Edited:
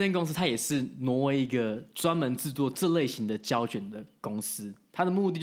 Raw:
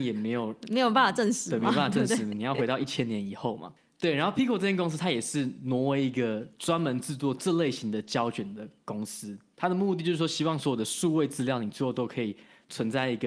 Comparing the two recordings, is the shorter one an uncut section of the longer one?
yes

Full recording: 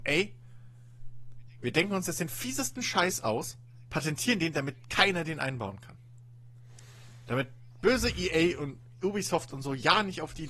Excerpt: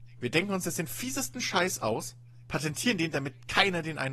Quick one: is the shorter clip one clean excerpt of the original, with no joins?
yes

